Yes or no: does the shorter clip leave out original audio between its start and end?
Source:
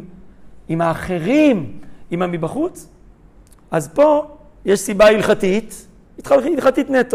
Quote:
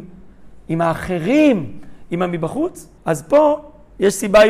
yes